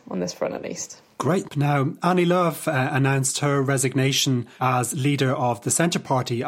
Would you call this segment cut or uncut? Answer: cut